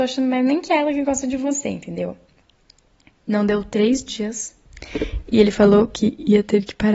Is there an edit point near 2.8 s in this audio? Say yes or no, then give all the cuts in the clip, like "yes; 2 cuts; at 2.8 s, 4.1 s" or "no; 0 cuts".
no; 0 cuts